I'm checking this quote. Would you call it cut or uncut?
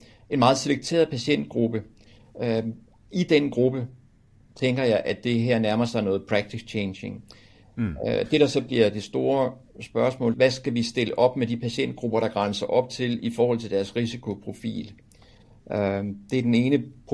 cut